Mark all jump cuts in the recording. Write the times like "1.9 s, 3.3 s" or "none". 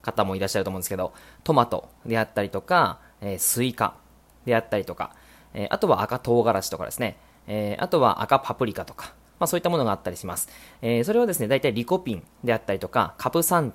none